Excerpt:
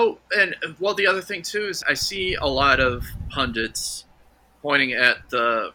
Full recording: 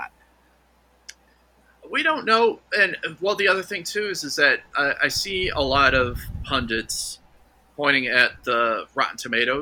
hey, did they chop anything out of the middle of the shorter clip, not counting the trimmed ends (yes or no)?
yes